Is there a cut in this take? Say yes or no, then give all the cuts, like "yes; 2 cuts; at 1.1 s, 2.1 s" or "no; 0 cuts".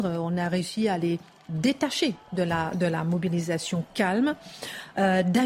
no; 0 cuts